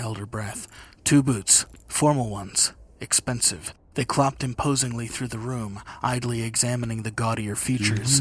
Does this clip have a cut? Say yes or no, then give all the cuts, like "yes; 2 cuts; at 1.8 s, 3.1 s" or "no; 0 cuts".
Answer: no; 0 cuts